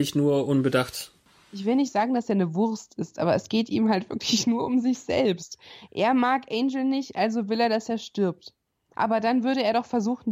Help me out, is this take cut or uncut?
cut